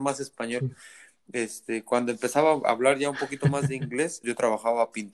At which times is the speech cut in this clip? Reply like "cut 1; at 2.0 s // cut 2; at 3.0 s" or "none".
cut 1; at 4.2 s